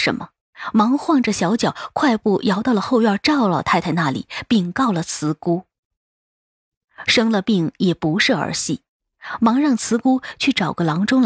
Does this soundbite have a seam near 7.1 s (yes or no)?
yes